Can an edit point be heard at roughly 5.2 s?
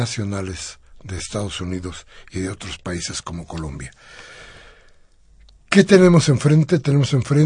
no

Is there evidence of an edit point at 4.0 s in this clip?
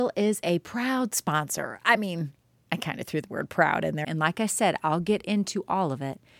yes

